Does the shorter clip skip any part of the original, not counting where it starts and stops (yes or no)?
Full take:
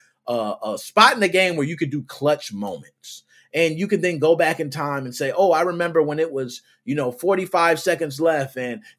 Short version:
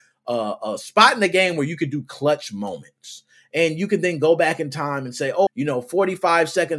yes